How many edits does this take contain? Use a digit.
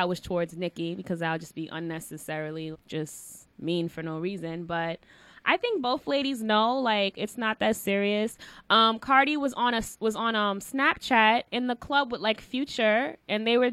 1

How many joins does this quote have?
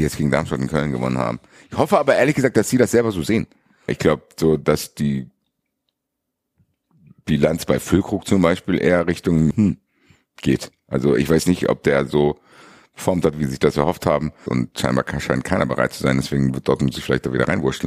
3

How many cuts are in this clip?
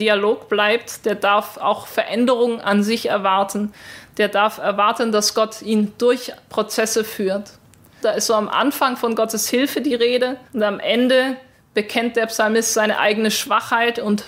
2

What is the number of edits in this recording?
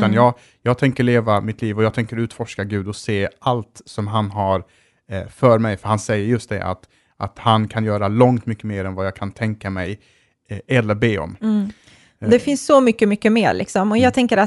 0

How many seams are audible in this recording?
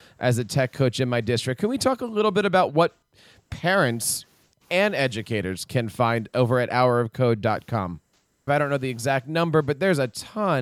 1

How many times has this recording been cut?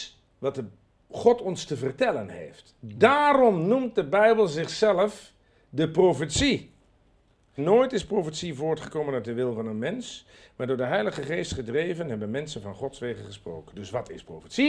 1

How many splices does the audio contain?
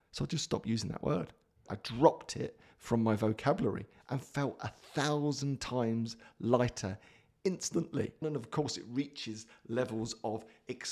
2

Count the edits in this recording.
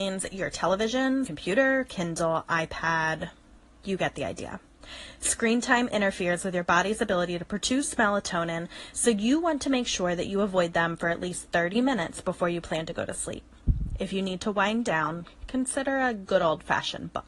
1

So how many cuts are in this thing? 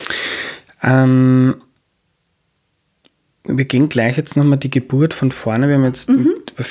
0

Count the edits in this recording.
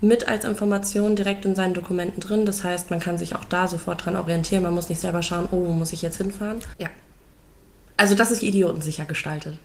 2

